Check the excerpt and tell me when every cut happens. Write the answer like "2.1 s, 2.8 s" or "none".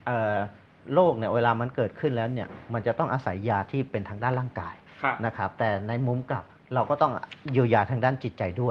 none